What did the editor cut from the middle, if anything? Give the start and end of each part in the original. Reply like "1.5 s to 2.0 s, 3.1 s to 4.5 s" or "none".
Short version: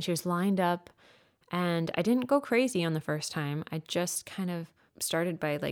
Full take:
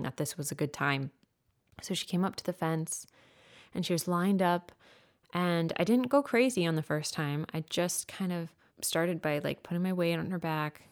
none

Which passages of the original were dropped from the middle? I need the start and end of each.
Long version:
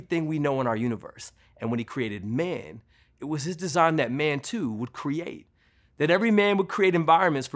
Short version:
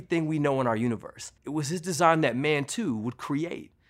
1.4 s to 3.1 s

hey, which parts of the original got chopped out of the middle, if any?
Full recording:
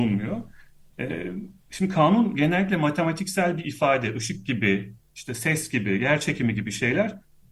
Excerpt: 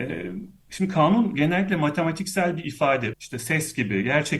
4.1 s to 5.1 s

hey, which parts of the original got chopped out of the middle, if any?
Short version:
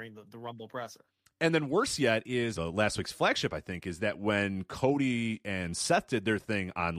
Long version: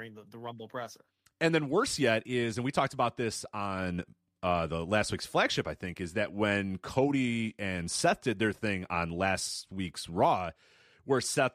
2.5 s to 4.7 s

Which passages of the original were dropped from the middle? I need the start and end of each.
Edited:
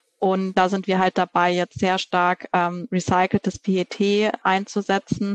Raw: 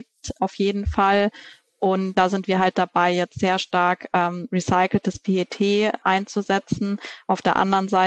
none

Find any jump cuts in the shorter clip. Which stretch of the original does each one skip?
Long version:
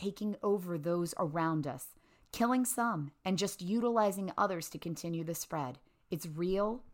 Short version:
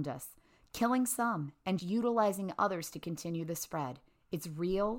3.4 s to 3.6 s

